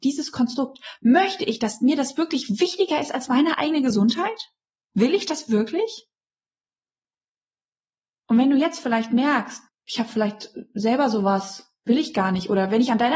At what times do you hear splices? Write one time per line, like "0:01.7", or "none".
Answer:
0:09.7